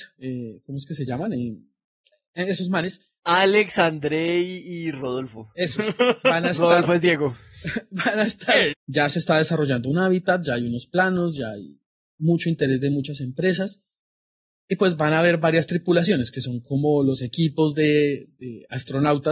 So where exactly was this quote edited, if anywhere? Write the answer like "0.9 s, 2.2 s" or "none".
8.7 s